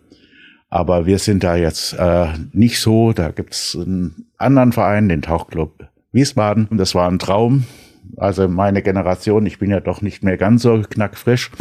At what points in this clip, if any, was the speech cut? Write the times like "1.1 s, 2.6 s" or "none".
6.7 s